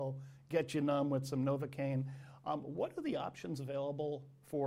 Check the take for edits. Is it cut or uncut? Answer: uncut